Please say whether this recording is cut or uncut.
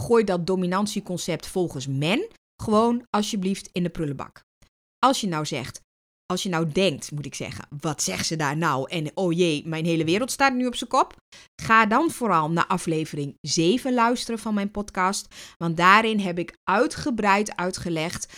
uncut